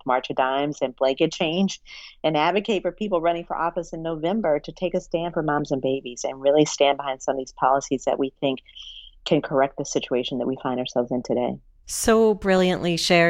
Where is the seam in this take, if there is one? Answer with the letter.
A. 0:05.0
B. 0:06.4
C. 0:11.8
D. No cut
D